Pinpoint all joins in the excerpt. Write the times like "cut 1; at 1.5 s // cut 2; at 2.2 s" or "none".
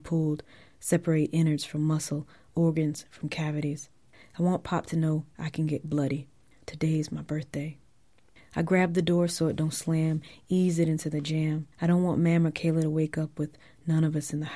cut 1; at 11.7 s